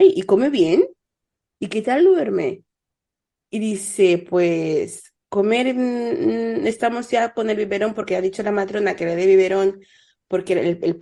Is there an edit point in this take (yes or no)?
no